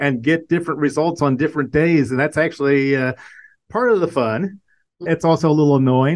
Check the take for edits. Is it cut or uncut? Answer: cut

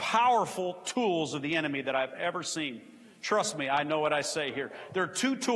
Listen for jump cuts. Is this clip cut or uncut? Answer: uncut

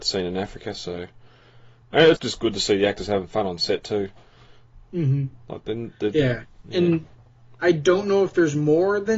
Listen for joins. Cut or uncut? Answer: cut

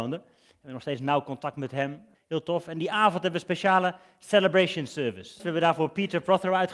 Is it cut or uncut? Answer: cut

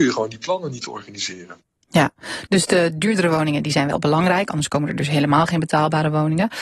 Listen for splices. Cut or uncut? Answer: uncut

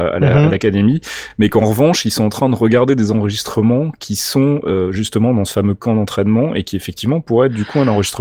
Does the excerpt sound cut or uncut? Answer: uncut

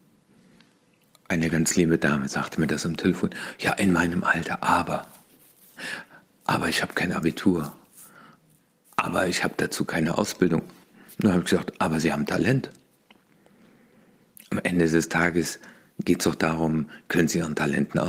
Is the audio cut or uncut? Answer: uncut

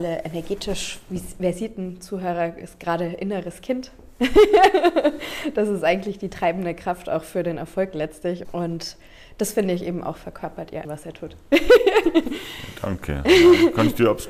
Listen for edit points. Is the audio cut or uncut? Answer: cut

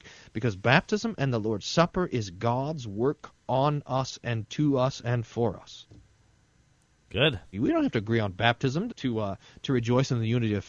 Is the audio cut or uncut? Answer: cut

